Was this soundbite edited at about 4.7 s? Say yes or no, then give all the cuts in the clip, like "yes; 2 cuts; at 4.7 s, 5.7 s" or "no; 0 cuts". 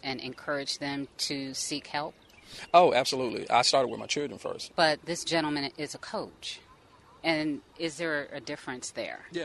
yes; 1 cut; at 4.7 s